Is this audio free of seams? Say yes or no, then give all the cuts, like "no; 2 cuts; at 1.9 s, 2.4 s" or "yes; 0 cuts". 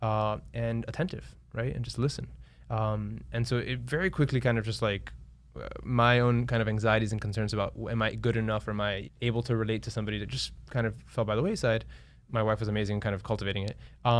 no; 1 cut; at 9.1 s